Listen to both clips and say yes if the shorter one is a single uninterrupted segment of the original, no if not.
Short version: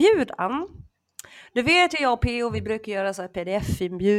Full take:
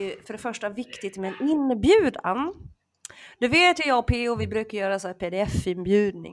yes